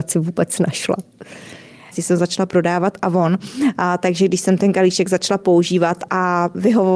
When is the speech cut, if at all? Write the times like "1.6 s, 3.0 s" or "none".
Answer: 1.9 s